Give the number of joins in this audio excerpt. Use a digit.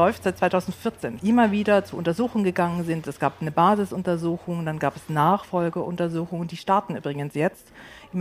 1